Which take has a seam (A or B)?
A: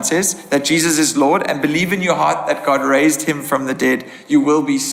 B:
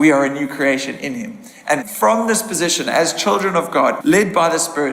B